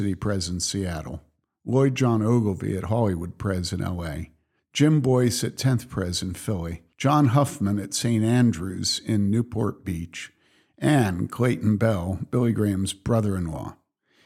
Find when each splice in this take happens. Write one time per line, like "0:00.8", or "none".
0:04.6
0:06.9

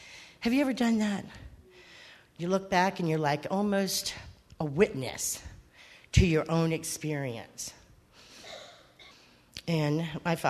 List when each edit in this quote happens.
0:09.1

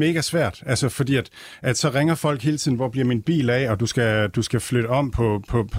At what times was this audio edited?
none

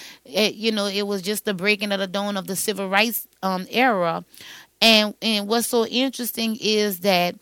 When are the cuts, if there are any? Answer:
none

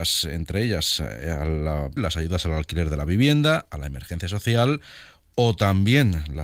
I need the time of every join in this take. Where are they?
0:02.0

